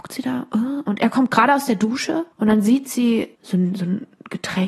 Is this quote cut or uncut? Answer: cut